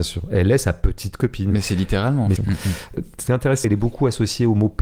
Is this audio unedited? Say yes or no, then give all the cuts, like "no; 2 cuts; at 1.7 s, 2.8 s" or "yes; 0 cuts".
no; 2 cuts; at 2.4 s, 3.6 s